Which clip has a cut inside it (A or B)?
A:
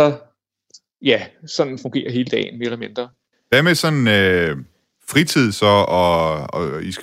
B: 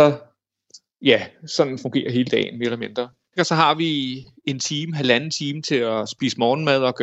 B